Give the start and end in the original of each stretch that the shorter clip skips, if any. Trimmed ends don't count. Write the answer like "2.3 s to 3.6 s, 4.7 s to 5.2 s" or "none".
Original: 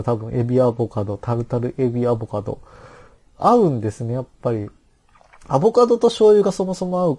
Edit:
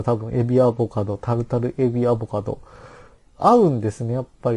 none